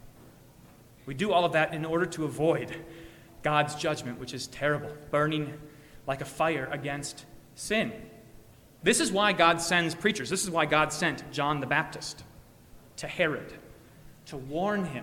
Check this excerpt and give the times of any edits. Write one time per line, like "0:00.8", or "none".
none